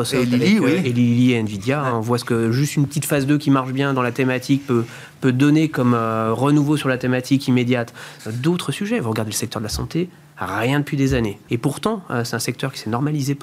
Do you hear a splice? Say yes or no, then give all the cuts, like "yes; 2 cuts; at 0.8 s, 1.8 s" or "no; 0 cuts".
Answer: yes; 2 cuts; at 8.2 s, 11.5 s